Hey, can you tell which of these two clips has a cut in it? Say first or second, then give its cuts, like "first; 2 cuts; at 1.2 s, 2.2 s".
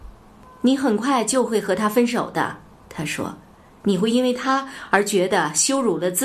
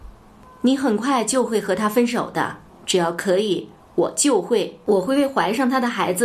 second; 1 cut; at 2.7 s